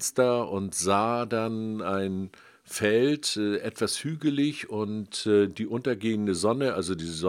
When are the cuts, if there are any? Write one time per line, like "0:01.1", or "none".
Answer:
none